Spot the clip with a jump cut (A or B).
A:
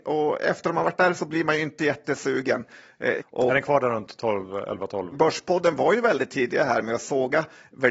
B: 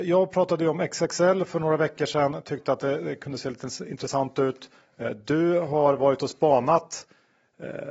A